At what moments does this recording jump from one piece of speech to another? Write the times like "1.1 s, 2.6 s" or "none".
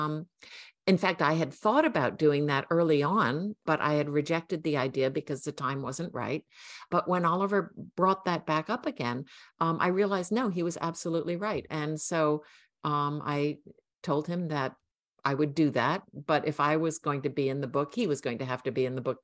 none

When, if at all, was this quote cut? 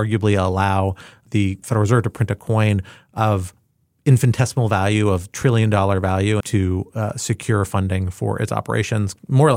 1.6 s, 6.4 s

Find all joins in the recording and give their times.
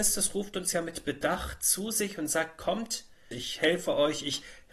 3.3 s

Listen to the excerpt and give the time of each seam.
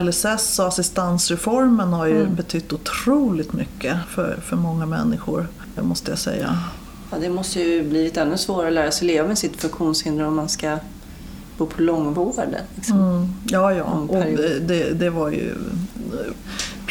5.8 s

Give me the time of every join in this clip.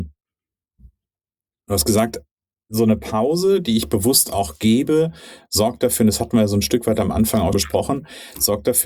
7.5 s

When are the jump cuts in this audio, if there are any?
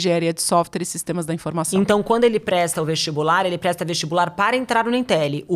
none

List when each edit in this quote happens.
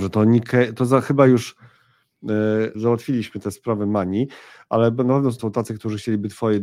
2.7 s, 5.4 s

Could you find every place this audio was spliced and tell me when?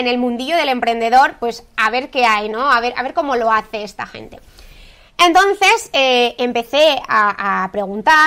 none

